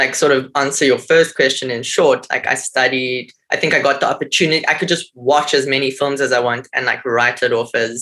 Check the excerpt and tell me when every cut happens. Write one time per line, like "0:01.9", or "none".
none